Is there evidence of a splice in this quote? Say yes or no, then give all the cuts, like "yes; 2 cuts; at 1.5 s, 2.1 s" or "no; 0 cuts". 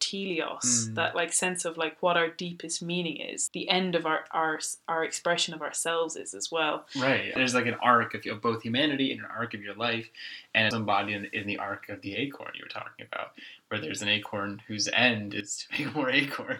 yes; 2 cuts; at 7.4 s, 10.7 s